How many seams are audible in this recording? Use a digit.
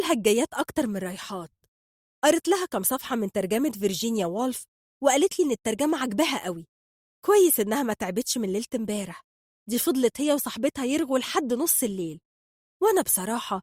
0